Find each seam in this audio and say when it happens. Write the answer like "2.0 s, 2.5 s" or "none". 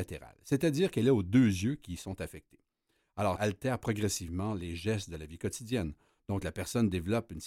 3.4 s